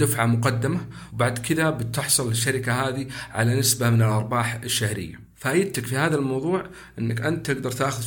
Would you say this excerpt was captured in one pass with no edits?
yes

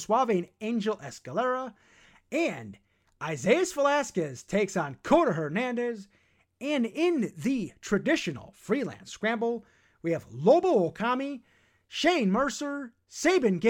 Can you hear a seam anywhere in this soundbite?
no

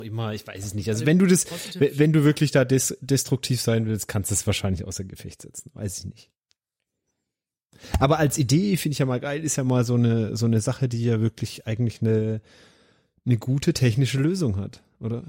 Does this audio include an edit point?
no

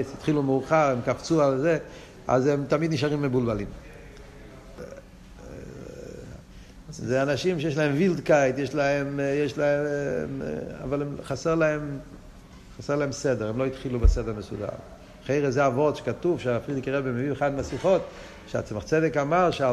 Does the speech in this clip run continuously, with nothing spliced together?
no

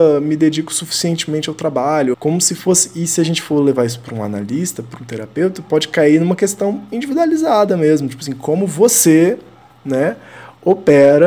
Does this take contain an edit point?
yes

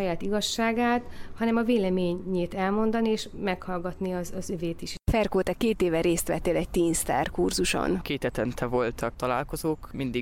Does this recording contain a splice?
no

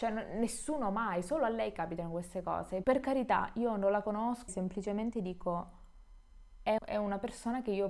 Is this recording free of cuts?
no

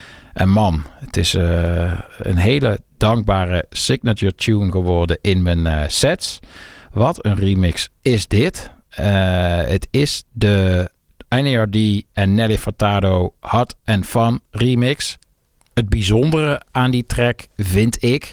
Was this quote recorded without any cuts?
yes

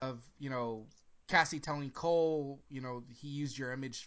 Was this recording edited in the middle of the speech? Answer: no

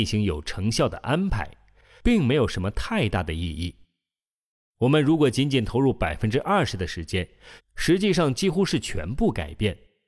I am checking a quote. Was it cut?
yes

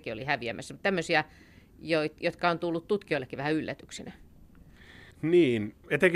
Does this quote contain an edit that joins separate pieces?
yes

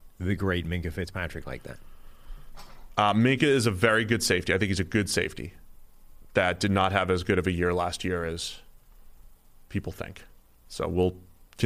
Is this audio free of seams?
yes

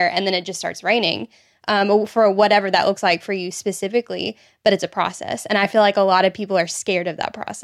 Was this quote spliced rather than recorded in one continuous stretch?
no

